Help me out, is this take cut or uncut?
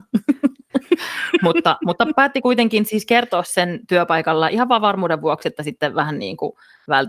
uncut